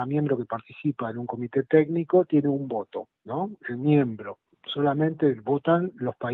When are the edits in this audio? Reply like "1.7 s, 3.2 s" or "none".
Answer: 3.2 s